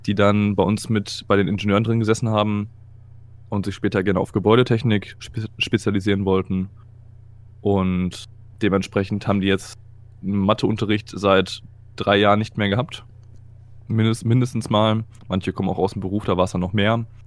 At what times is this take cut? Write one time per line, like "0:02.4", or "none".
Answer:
none